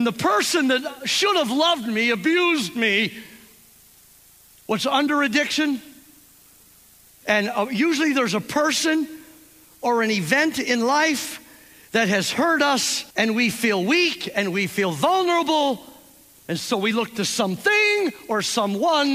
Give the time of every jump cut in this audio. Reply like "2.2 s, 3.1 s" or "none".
7.2 s, 13.1 s